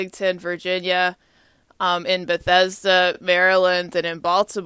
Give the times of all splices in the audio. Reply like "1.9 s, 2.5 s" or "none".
none

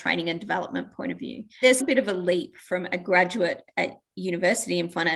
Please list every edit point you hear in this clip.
1.8 s

